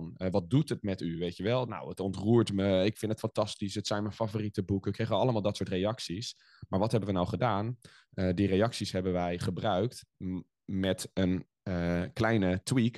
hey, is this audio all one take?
yes; 0 cuts

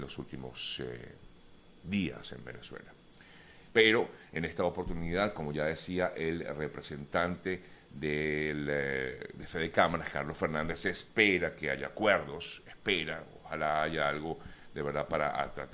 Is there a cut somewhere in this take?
yes; 1 cut; at 3.7 s

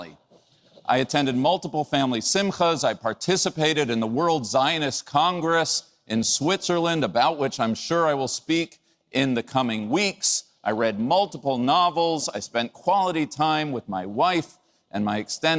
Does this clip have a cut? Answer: no; 0 cuts

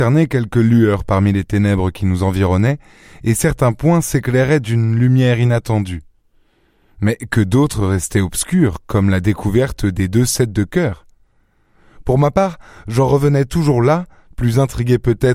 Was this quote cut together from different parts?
no; 0 cuts

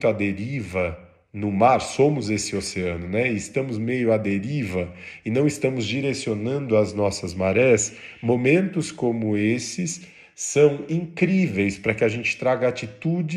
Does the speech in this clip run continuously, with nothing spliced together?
yes; 0 cuts

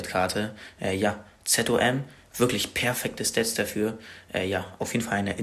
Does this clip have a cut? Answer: no; 0 cuts

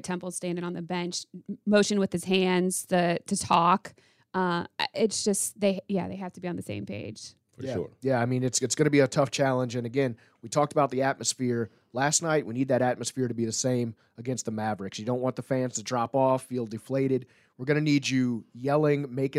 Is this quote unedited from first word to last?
yes; 0 cuts

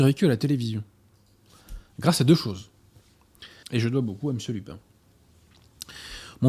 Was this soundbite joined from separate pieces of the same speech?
yes; 1 cut; at 3.6 s

